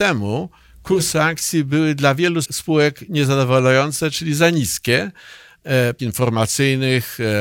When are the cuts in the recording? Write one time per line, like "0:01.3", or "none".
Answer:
0:02.4
0:06.0